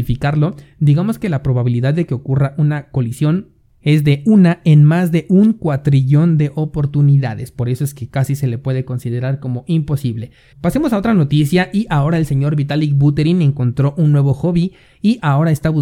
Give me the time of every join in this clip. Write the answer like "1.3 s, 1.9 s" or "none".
10.5 s